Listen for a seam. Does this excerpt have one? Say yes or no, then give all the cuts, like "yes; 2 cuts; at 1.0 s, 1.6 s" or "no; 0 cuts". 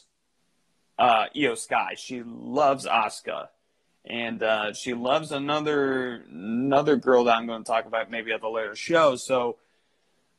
no; 0 cuts